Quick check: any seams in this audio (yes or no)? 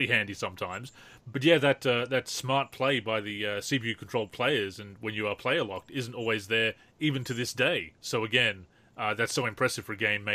no